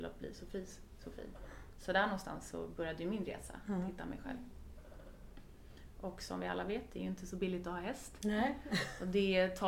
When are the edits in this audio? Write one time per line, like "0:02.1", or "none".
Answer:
none